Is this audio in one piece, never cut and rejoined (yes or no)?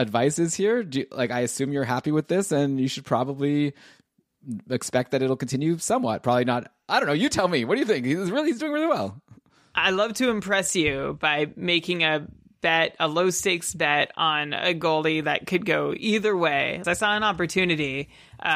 no